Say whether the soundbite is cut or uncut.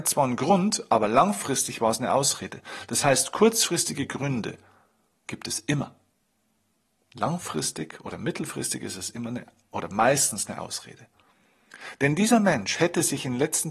uncut